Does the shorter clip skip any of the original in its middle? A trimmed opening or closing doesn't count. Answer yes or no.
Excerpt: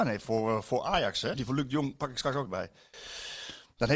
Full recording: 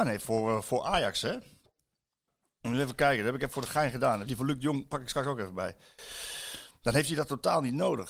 yes